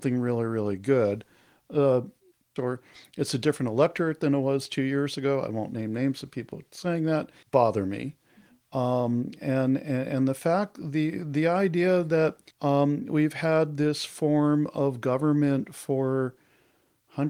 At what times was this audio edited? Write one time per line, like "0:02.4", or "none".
0:02.6
0:07.4
0:12.5